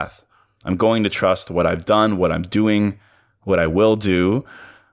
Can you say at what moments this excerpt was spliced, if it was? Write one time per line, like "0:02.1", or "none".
none